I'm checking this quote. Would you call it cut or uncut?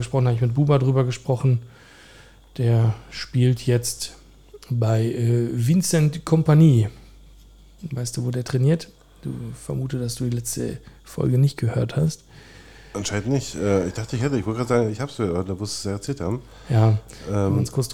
uncut